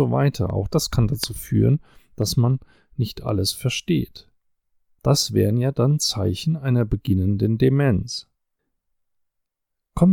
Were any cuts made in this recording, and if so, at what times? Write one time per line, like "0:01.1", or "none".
0:05.0